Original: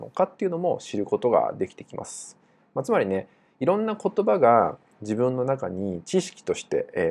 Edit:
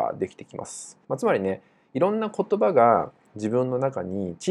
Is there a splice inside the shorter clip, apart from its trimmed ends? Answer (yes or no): yes